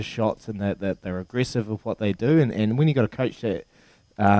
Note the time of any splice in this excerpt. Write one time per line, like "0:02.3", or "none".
none